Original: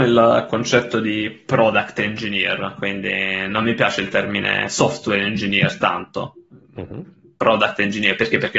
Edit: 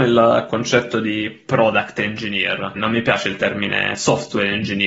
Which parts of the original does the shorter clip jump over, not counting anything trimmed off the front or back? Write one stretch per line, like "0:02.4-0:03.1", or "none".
0:02.8-0:03.5